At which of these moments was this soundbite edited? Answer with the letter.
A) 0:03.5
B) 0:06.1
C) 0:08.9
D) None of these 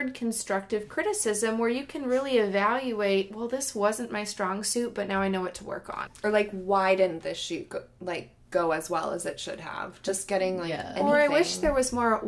B